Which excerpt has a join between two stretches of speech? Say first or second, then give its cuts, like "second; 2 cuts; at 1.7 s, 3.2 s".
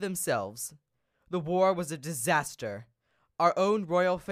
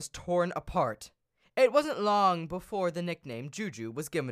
second; 1 cut; at 1.4 s